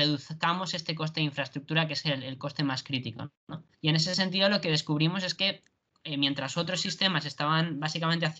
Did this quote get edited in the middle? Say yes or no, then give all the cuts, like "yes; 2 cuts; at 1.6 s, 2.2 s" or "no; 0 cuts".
yes; 1 cut; at 3.7 s